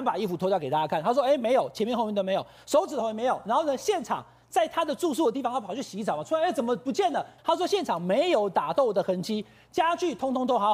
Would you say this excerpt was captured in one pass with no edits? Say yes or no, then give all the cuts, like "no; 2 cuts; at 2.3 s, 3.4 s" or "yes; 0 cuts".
no; 1 cut; at 7.4 s